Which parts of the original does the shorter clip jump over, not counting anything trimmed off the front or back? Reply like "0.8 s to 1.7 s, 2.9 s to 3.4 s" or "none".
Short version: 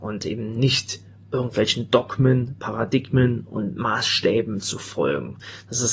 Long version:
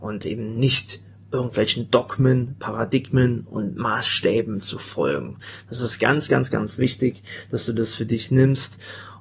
none